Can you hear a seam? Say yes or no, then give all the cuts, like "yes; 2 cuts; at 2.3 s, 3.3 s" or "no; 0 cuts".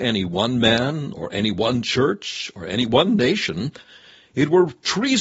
no; 0 cuts